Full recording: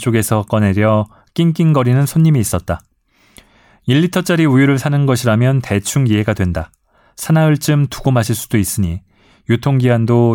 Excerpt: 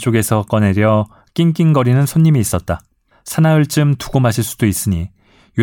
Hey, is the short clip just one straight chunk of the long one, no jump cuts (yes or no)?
no